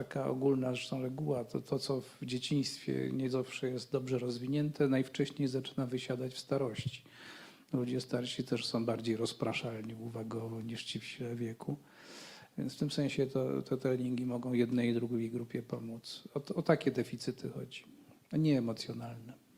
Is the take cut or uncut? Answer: cut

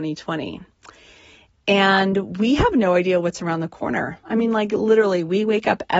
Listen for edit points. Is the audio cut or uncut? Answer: uncut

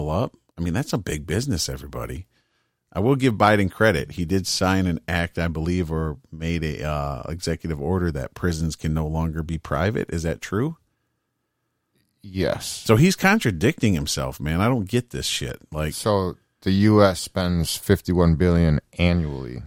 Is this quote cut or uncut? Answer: uncut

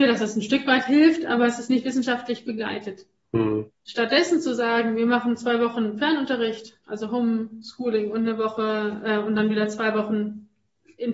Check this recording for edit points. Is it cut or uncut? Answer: uncut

